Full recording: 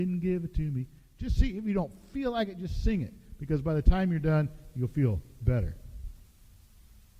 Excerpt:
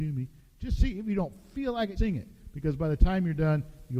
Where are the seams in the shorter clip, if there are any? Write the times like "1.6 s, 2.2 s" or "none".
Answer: 2.0 s

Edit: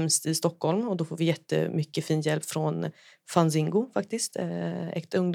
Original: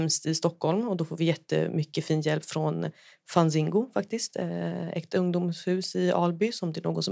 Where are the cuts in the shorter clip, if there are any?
none

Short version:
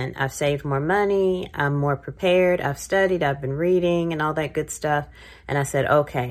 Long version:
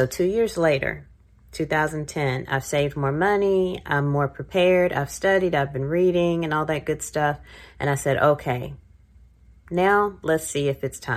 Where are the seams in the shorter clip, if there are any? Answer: none

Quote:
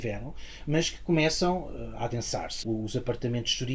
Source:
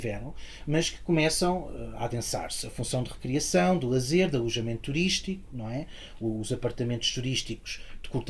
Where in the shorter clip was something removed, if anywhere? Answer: 2.6 s

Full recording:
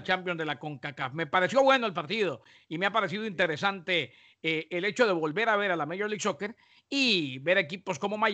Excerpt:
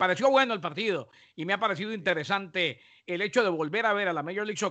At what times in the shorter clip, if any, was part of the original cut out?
3.1 s

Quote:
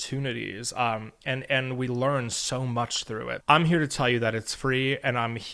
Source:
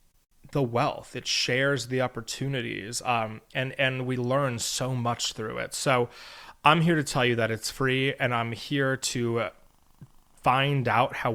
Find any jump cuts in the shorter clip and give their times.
3.4 s

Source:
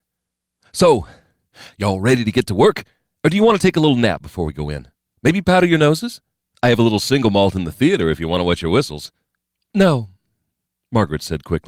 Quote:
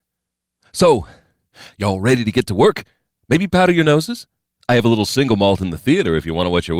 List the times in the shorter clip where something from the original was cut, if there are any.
3.1 s

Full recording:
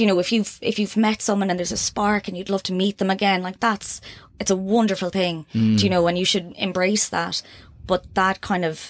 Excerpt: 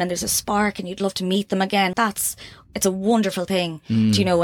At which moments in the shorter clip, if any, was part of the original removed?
1.9 s

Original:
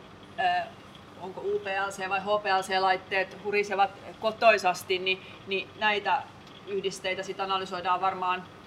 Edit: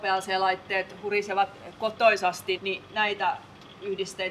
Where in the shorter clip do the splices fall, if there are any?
2.6 s

